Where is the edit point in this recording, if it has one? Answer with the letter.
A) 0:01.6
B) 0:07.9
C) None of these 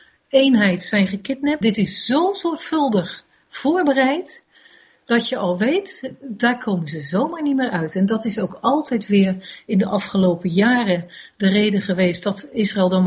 A